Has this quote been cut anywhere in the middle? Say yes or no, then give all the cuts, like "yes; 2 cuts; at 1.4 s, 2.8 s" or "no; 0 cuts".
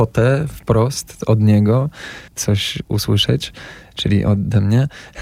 yes; 1 cut; at 2.3 s